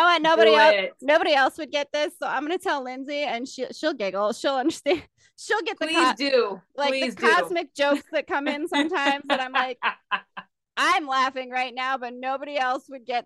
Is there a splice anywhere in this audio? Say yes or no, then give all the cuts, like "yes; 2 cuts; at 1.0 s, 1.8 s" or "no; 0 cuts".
no; 0 cuts